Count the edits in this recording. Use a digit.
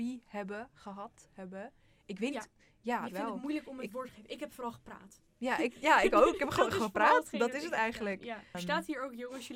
1